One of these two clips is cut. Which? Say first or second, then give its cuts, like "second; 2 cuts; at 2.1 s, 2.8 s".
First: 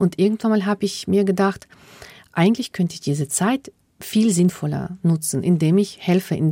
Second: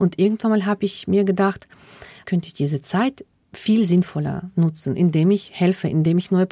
second; 1 cut; at 2.2 s